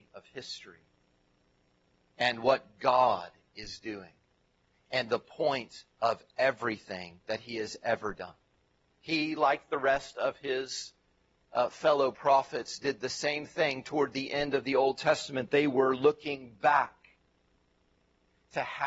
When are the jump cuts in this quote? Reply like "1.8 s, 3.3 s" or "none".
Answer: 8.8 s